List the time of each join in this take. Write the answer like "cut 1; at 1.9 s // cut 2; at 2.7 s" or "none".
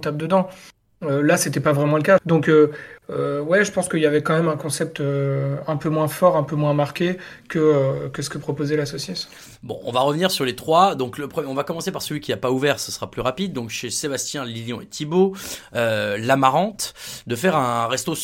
cut 1; at 2.2 s